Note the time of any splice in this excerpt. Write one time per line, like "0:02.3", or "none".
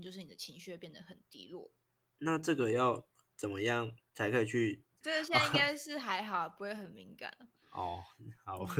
0:05.0